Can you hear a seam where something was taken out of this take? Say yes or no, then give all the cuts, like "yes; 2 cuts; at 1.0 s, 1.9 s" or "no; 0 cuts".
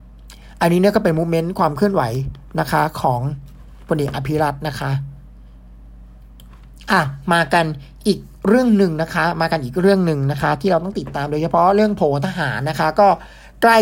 no; 0 cuts